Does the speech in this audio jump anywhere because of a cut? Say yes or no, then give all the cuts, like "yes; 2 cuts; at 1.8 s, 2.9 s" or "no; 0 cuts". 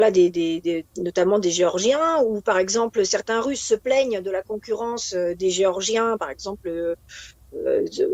no; 0 cuts